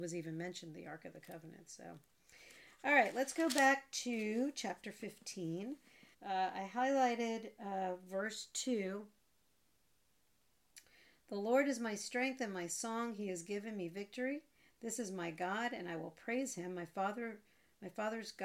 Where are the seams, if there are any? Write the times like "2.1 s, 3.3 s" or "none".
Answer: 6.1 s